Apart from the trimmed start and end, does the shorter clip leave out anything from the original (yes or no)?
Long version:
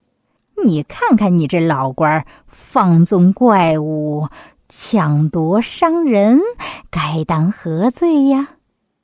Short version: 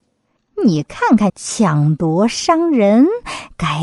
yes